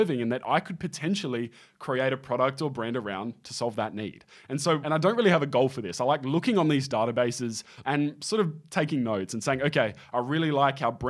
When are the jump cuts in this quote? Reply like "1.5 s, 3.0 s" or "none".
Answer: 4.8 s, 7.8 s